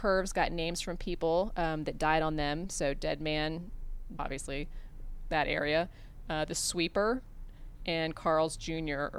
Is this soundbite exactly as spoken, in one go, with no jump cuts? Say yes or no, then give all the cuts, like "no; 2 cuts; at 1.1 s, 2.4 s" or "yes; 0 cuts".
no; 1 cut; at 4.2 s